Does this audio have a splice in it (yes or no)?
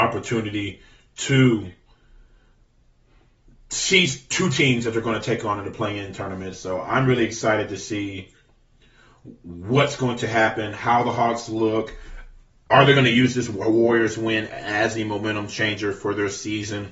no